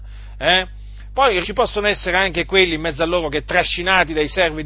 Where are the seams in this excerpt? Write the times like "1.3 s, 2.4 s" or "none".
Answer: 1.4 s

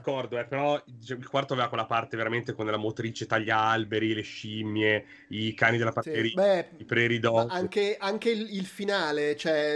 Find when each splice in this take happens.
none

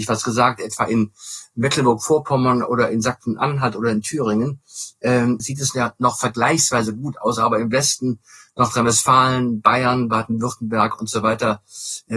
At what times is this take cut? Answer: 5.4 s

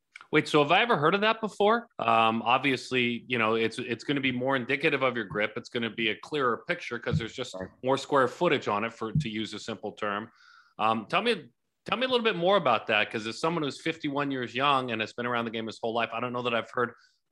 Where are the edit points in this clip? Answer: 1.9 s

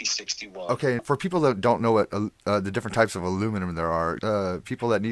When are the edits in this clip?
1.0 s, 4.2 s

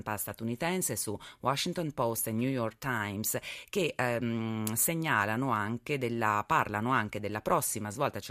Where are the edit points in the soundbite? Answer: none

